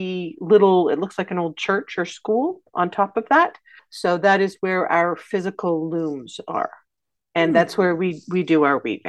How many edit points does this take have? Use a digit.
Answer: 1